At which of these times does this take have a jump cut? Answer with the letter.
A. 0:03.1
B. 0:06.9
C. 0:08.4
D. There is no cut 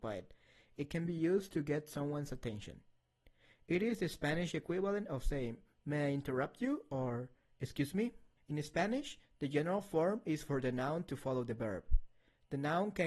C